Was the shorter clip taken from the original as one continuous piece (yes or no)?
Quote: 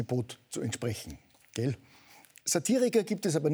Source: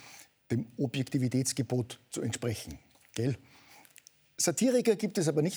no